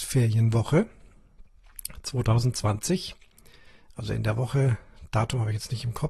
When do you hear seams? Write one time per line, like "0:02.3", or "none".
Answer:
none